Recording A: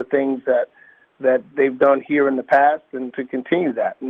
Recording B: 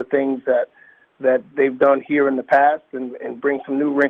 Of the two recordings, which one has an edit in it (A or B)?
A